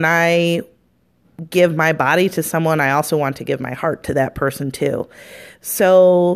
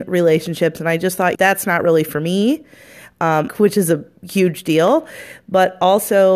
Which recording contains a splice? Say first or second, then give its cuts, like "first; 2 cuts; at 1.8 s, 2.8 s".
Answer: second; 2 cuts; at 1.3 s, 3.5 s